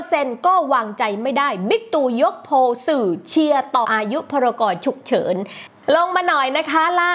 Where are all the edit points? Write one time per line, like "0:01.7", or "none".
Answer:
0:03.8